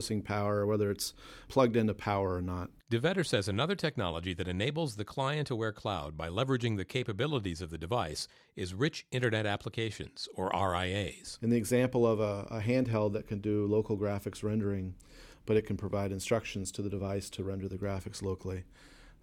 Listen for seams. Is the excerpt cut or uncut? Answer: cut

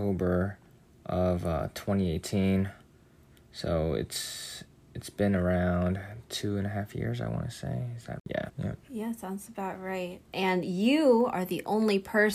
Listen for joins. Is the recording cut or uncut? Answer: cut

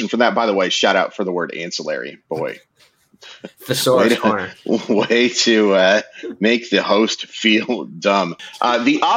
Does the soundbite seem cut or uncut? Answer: uncut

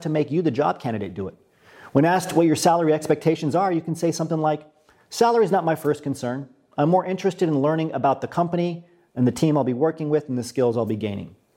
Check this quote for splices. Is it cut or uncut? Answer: uncut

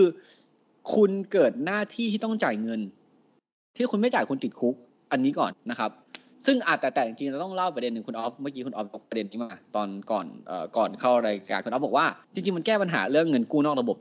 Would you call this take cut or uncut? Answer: cut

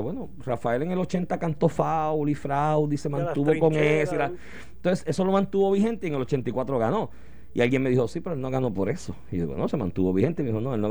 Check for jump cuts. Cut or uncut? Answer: uncut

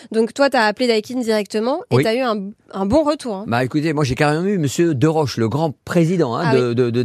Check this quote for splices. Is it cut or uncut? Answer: uncut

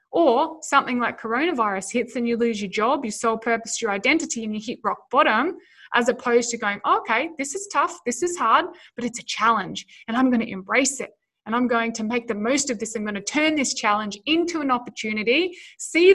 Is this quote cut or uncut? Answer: uncut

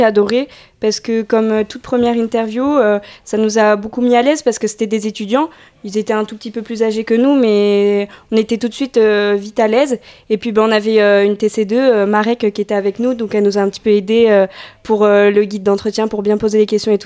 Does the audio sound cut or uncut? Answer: uncut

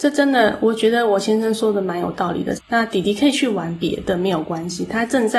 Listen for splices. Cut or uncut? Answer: cut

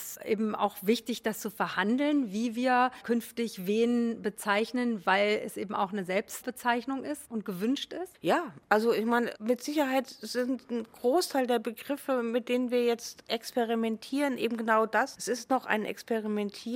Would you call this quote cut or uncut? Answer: uncut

